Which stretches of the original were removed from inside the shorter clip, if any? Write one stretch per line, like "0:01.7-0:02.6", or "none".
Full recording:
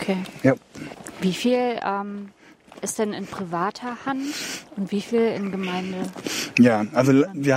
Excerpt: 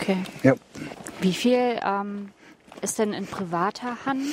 none